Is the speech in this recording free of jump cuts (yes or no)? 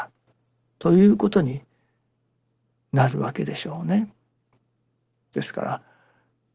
yes